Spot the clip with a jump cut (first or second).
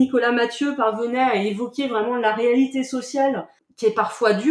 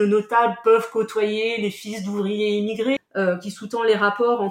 second